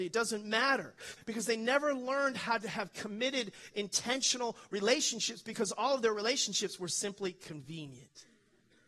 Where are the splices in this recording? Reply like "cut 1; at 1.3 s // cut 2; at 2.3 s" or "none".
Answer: cut 1; at 1.2 s

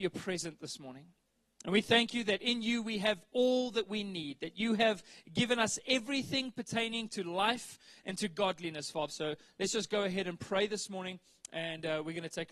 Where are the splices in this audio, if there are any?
cut 1; at 9.1 s

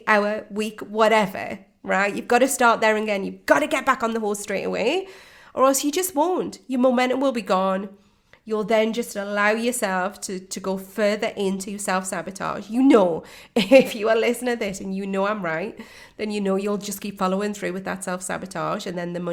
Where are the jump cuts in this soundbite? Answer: none

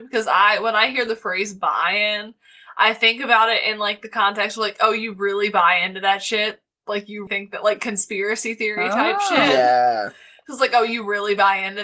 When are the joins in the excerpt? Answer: cut 1; at 7.3 s

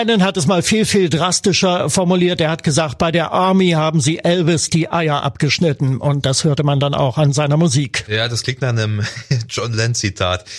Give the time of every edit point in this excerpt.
none

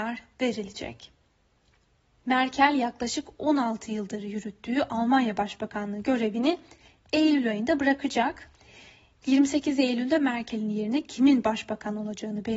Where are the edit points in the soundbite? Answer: cut 1; at 2.2 s

